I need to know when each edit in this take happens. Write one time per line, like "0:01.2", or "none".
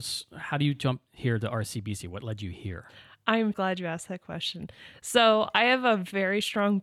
0:03.5